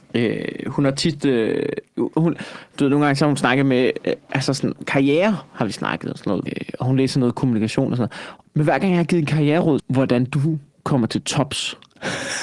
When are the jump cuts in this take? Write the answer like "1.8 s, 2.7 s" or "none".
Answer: 6.5 s, 8.4 s, 9.8 s